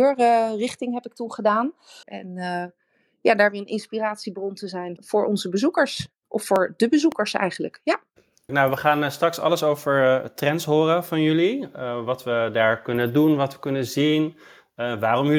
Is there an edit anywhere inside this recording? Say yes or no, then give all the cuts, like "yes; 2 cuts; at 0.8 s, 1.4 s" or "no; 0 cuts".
yes; 3 cuts; at 2.0 s, 5.0 s, 8.5 s